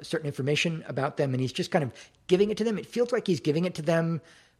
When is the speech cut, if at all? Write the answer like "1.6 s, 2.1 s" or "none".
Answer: none